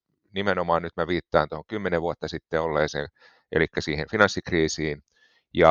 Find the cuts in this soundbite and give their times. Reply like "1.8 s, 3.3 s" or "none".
none